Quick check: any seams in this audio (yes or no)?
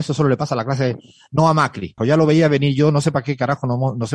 yes